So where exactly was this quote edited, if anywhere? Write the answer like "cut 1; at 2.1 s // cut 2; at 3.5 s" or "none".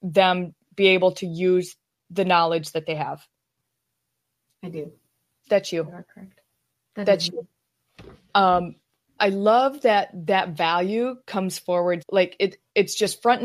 cut 1; at 9.2 s // cut 2; at 12.0 s